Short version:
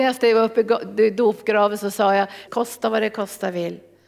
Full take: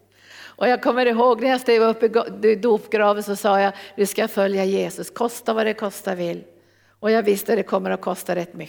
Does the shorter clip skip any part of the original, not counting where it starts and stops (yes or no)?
yes